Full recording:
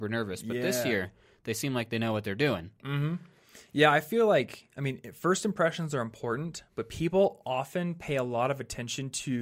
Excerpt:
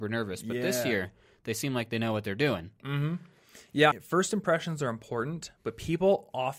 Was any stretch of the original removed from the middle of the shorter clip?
yes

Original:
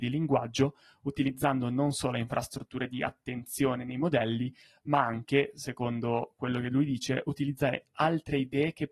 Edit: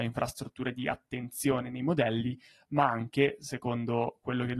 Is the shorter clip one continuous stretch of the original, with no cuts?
yes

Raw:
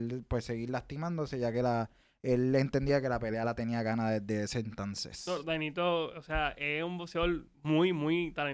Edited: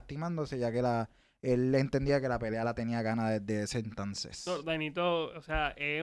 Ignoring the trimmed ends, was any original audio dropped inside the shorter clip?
no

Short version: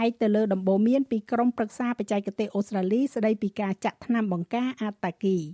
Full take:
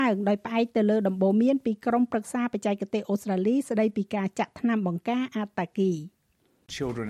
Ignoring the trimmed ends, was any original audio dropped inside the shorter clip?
no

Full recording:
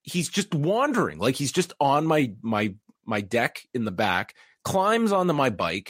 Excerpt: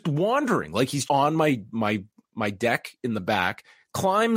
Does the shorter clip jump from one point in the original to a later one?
yes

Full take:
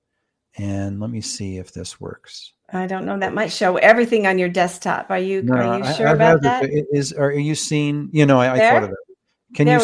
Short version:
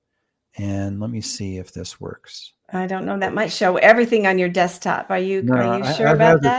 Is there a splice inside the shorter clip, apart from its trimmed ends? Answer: no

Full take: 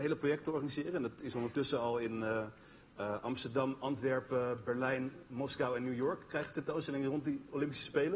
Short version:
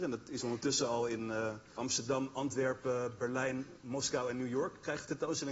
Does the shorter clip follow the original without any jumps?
no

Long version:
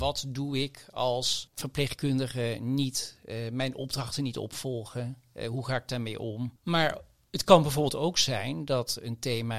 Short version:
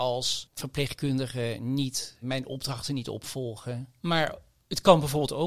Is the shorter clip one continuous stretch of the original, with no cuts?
no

